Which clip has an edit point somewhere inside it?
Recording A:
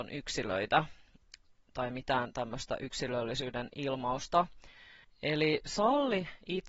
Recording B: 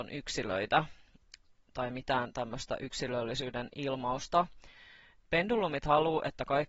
A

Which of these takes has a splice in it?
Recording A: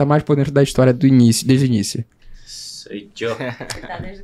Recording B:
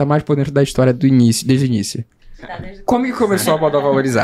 B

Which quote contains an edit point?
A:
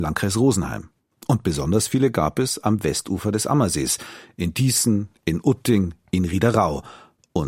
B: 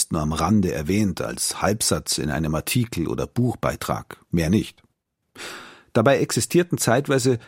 B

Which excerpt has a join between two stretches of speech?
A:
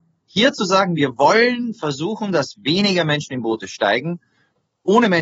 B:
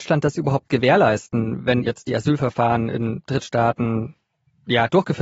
B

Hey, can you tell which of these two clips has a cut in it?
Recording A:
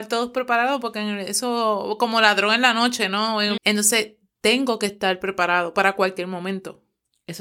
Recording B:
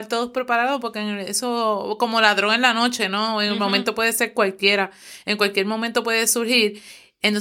A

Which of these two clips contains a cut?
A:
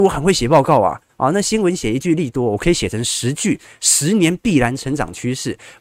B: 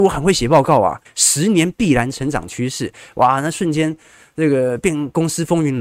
B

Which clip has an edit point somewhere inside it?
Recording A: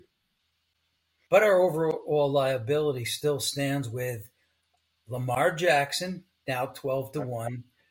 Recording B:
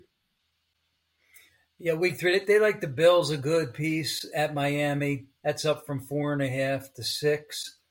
A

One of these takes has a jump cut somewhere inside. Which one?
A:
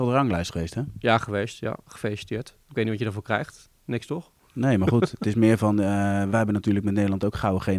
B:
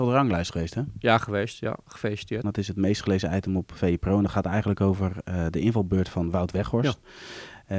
B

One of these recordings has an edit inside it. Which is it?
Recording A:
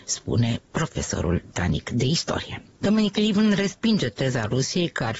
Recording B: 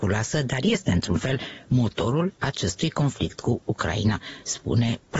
A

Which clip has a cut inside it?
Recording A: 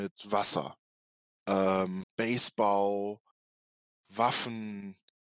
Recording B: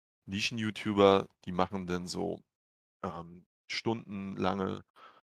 A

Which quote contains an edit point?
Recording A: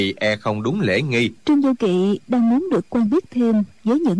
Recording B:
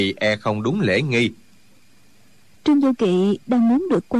A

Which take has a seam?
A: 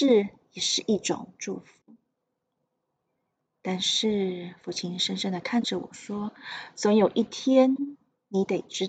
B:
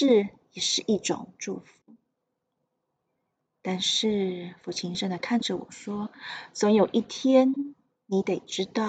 B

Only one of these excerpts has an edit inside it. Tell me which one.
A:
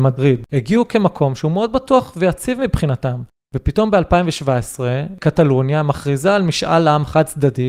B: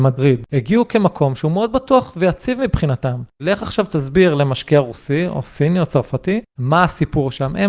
B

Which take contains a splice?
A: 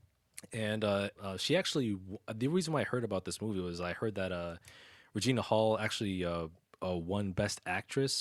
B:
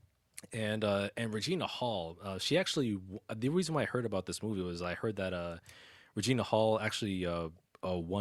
A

